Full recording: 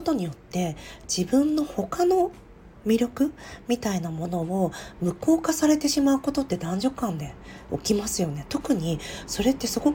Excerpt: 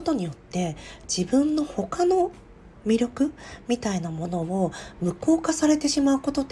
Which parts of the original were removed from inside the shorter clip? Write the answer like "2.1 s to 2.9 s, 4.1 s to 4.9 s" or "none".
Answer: none